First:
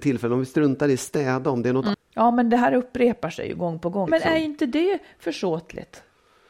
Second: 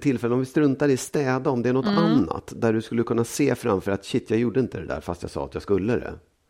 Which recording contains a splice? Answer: first; 2 cuts; at 1.9 s, 4.1 s

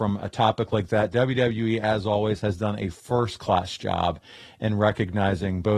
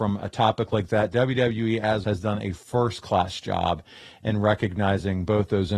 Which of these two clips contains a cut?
second; 1 cut; at 2.0 s

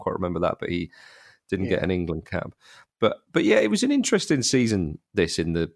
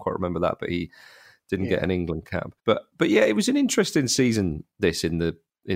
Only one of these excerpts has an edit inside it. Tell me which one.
second; 1 cut; at 2.6 s

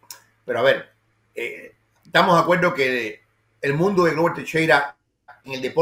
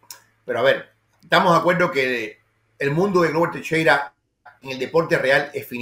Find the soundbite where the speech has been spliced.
second; 1 cut; at 1.1 s

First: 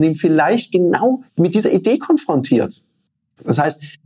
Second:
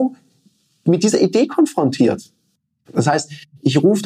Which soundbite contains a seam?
first; 1 cut; at 1.3 s

